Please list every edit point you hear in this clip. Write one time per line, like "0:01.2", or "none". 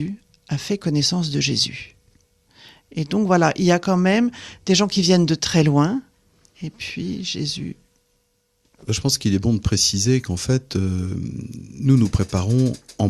none